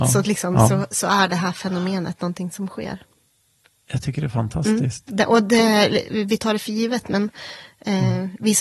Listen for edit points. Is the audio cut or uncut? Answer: uncut